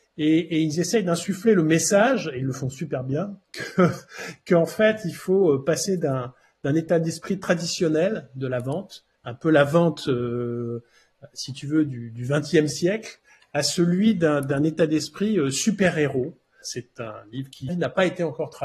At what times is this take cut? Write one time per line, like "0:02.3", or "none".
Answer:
0:16.6
0:17.7